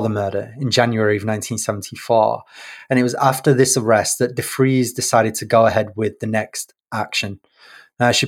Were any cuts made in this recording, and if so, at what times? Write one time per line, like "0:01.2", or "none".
none